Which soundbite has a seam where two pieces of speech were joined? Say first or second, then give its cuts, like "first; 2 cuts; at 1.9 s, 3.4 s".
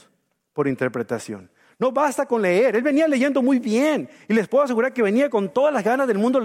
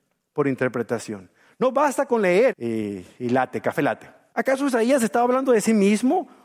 second; 2 cuts; at 2.5 s, 4.3 s